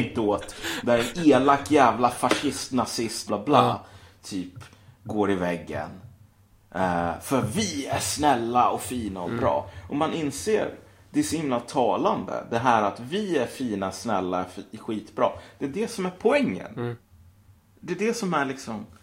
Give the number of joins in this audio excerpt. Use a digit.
1